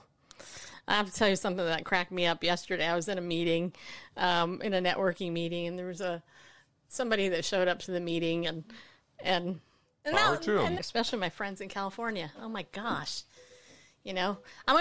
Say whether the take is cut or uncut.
cut